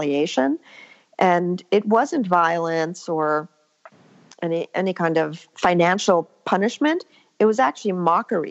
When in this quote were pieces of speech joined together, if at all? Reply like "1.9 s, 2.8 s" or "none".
none